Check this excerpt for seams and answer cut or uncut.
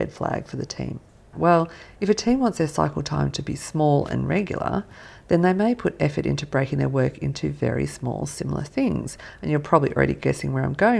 cut